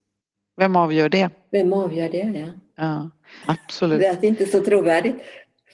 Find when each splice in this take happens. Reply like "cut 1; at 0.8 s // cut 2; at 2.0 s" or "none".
cut 1; at 3.4 s